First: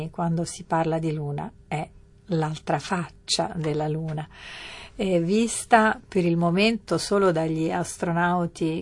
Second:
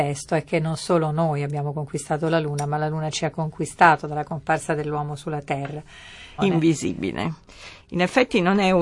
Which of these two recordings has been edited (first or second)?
second